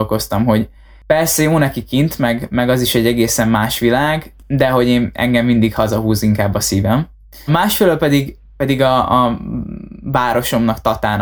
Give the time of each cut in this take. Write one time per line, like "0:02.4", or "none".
0:07.5